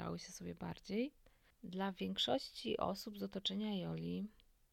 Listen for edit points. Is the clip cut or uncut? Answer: cut